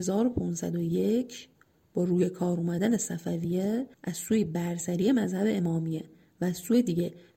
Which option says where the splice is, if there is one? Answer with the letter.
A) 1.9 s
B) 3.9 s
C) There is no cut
B